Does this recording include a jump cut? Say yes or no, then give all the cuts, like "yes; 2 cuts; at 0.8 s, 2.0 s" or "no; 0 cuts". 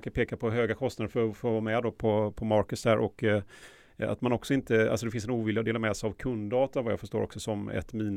no; 0 cuts